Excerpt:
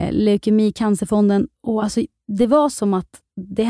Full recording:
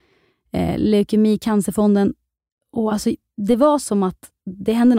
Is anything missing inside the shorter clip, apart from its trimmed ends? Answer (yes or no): yes